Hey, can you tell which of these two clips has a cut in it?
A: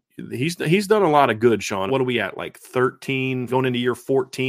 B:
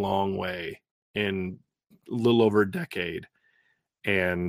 A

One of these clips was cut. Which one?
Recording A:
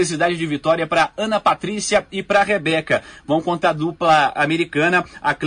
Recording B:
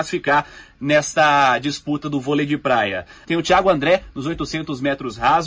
B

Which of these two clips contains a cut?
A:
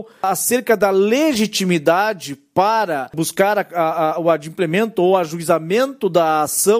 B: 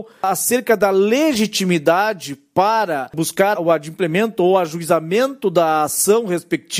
B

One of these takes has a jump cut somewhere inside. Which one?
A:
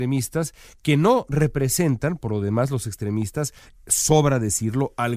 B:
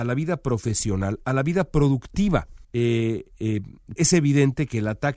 B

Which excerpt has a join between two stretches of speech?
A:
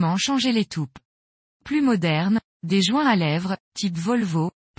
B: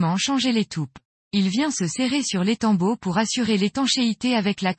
B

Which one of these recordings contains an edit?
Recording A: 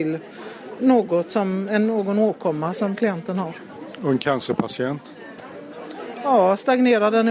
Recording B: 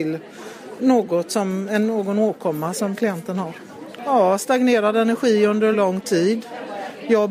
B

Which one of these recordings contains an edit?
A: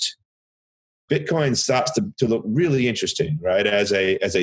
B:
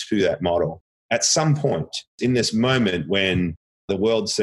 B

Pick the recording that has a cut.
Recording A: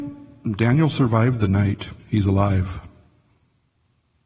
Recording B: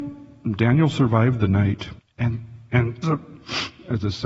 B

